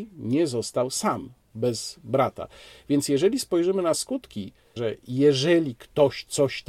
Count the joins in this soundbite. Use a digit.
1